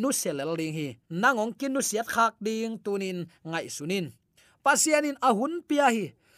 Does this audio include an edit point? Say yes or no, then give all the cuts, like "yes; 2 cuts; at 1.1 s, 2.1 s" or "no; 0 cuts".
yes; 1 cut; at 1.0 s